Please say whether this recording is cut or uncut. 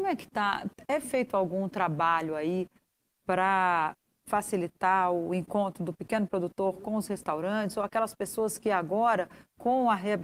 uncut